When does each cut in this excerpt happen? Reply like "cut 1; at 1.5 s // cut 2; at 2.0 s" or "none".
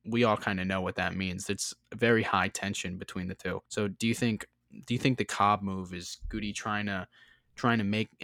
cut 1; at 3.7 s

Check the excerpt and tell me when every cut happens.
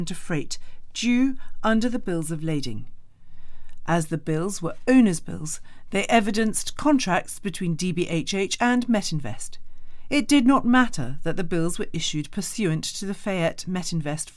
none

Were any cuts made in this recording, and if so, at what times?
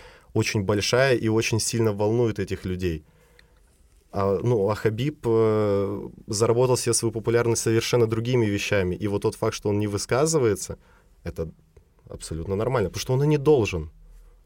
none

